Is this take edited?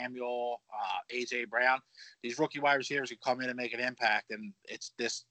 no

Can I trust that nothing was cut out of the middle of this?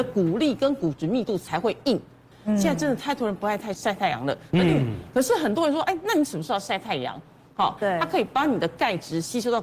no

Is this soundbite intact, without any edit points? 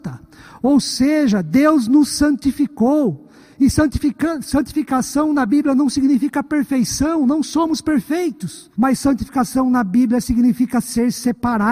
no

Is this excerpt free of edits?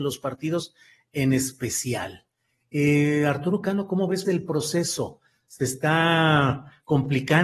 no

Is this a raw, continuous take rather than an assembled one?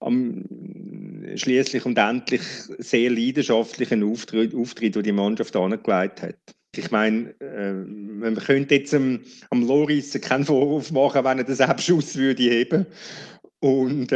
no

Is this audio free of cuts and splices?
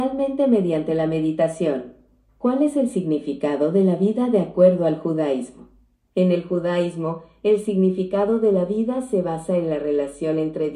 yes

